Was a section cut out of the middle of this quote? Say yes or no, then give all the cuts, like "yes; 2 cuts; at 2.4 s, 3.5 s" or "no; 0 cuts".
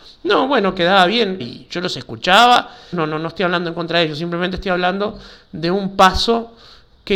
yes; 2 cuts; at 1.4 s, 2.9 s